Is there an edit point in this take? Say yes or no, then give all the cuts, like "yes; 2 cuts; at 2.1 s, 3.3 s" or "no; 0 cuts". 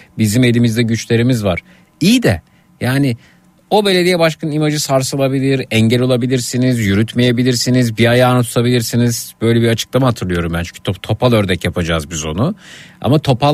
no; 0 cuts